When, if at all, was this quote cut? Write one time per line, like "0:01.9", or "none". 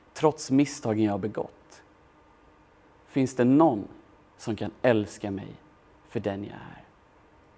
none